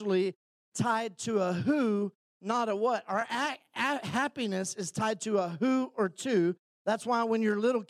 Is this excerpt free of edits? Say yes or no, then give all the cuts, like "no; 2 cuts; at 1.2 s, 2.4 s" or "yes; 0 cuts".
yes; 0 cuts